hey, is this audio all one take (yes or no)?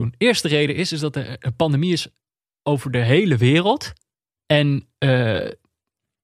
yes